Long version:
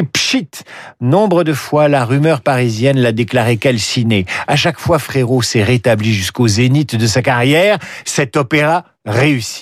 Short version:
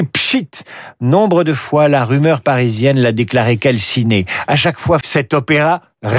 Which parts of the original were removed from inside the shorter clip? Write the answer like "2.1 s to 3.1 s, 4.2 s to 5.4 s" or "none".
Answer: 5.0 s to 8.0 s